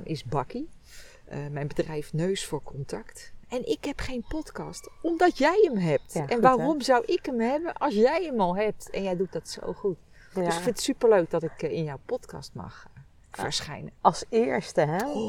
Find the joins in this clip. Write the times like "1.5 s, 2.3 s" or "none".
none